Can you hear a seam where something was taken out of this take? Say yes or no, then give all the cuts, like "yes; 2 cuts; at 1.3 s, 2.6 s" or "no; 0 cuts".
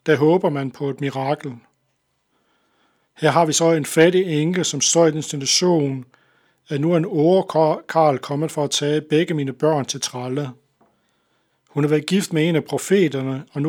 no; 0 cuts